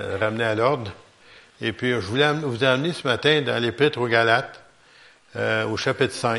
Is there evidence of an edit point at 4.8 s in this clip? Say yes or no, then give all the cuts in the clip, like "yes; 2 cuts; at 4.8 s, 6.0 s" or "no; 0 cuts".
no; 0 cuts